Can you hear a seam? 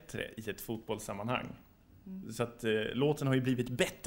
no; 0 cuts

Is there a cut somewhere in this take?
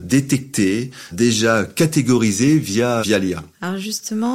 yes; 2 cuts; at 1.1 s, 3.0 s

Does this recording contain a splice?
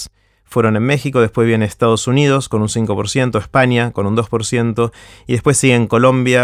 no; 0 cuts

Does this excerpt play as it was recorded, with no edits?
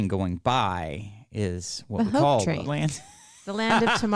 no; 1 cut; at 2.7 s

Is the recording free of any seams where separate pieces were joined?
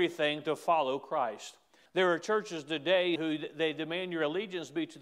no; 2 cuts; at 1.9 s, 3.2 s

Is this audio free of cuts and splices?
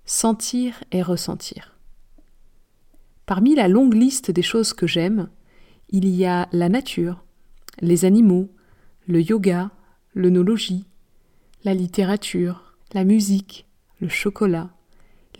no; 1 cut; at 12.8 s

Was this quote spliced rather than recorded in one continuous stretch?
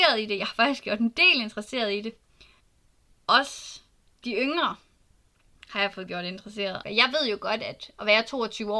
yes; 1 cut; at 6.8 s

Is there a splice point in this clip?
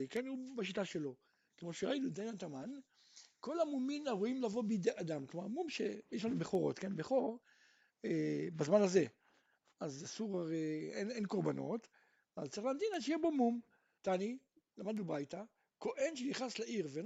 yes; 1 cut; at 14.0 s

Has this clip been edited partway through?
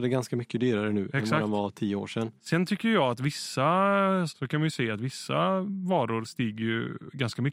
yes; 2 cuts; at 2.4 s, 4.3 s

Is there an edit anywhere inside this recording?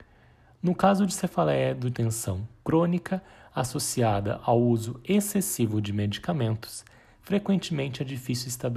yes; 1 cut; at 1.9 s

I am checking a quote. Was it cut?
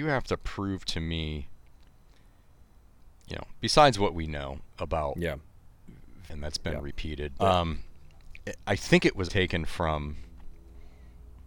yes; 3 cuts; at 6.3 s, 7.4 s, 9.3 s

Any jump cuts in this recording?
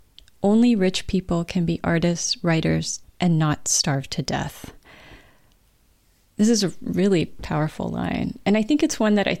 yes; 1 cut; at 3.0 s

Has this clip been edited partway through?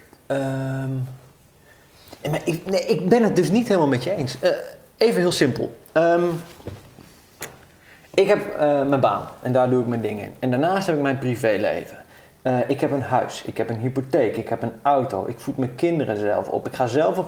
no; 0 cuts

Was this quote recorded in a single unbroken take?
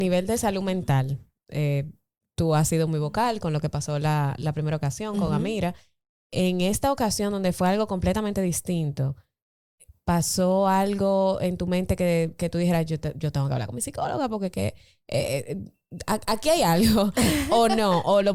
yes; 0 cuts

